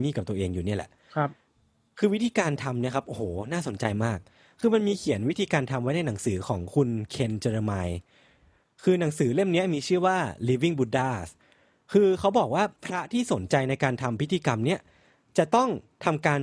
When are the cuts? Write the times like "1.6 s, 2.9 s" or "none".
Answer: 12.7 s